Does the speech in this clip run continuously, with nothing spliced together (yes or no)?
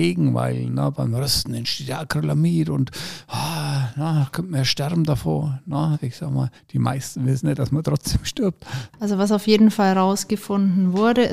no